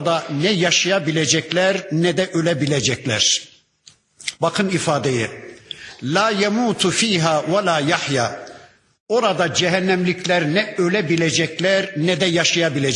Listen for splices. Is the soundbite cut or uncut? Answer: uncut